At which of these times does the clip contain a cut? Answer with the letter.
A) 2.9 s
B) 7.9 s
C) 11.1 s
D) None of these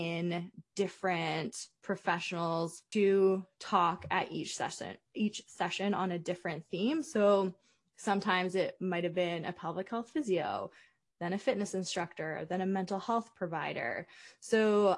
A